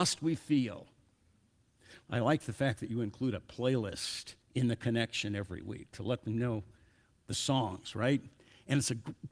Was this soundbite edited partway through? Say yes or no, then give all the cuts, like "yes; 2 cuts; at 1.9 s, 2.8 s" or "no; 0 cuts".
yes; 2 cuts; at 2.0 s, 4.4 s